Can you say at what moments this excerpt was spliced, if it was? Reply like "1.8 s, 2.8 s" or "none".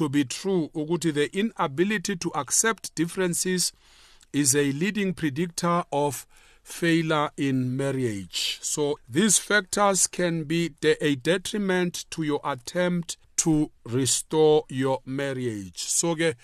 9.0 s, 13.2 s